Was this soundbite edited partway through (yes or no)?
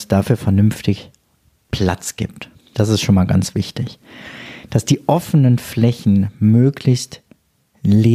yes